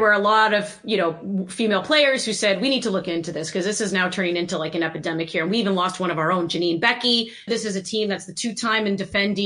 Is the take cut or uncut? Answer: cut